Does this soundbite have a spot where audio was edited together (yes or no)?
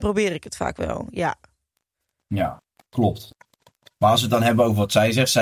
no